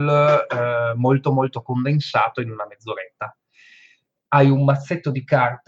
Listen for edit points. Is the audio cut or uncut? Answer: uncut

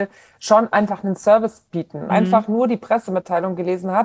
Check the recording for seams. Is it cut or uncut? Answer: cut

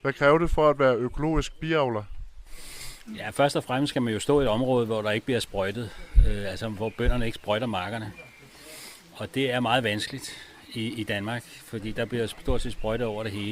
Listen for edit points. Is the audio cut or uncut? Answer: uncut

